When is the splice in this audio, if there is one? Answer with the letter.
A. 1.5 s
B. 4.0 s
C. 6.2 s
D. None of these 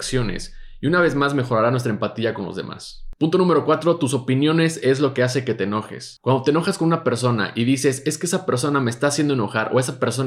D